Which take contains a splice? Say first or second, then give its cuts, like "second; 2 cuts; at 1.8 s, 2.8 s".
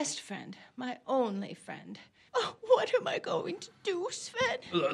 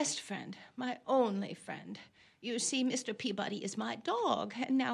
first; 1 cut; at 2.3 s